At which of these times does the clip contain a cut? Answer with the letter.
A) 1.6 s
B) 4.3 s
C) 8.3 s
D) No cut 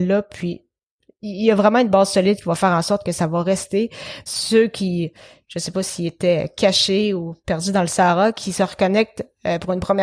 B